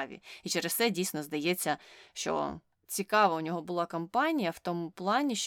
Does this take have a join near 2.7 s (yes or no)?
yes